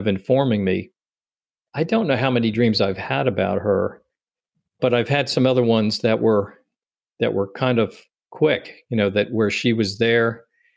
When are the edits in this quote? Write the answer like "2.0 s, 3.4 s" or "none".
none